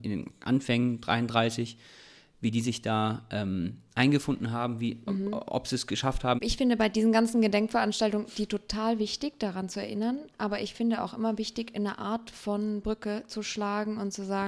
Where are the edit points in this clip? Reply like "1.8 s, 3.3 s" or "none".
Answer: 6.4 s